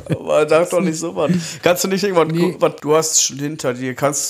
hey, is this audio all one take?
no; 1 cut; at 2.8 s

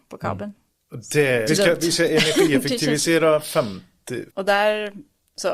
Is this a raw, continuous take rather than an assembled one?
no; 2 cuts; at 1.5 s, 4.3 s

